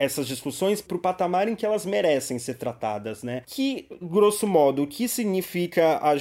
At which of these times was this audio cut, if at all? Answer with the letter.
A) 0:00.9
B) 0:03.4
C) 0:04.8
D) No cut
B